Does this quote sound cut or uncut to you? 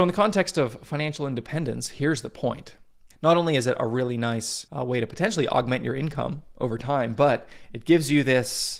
cut